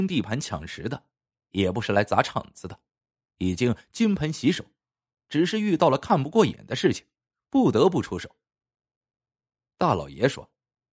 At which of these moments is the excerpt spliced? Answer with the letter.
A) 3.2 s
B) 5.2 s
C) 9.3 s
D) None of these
D